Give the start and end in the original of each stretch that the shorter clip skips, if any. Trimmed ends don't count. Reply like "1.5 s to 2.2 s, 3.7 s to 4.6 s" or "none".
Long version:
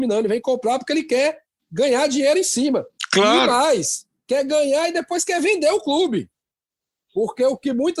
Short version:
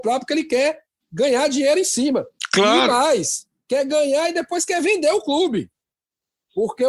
none